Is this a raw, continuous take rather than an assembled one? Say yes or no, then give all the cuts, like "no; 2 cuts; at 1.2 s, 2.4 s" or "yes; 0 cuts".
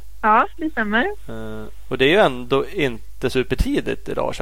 no; 1 cut; at 3.3 s